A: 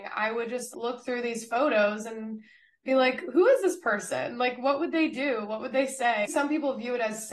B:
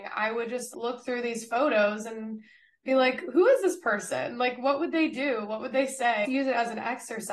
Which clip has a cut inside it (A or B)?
A